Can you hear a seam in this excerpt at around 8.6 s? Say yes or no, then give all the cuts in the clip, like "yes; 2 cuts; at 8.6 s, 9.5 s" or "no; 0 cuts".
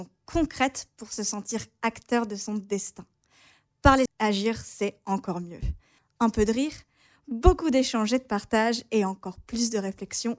no; 2 cuts; at 4.1 s, 6.0 s